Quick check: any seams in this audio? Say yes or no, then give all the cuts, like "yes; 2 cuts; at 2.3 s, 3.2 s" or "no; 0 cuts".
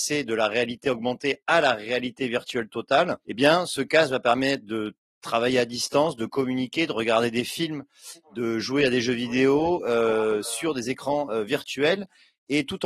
yes; 1 cut; at 3.2 s